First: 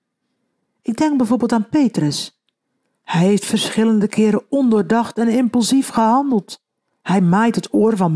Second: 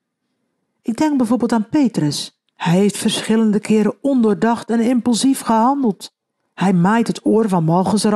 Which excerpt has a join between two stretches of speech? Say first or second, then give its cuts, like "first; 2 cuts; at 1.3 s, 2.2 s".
second; 1 cut; at 2.5 s